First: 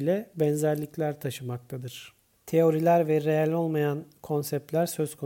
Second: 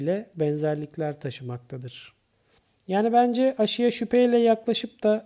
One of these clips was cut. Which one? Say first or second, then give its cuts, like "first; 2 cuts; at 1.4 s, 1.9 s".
first; 1 cut; at 2.4 s